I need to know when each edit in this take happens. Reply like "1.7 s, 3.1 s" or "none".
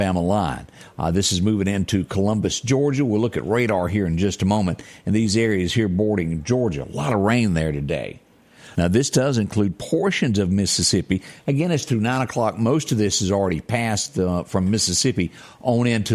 8.7 s